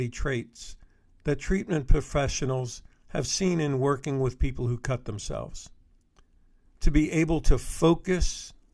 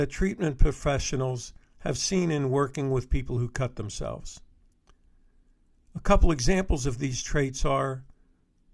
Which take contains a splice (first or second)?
first